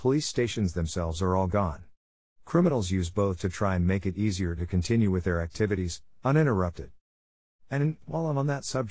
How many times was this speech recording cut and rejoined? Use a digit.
2